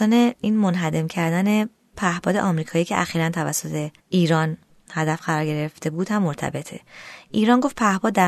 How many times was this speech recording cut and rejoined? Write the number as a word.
one